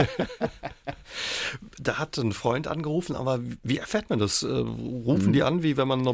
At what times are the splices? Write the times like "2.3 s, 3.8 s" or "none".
1.8 s